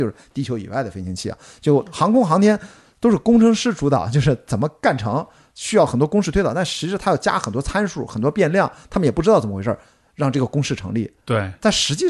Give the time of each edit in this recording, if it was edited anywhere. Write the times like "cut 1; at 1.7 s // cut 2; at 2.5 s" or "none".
none